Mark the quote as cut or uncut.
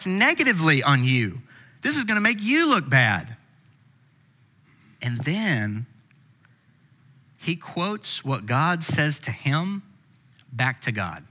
uncut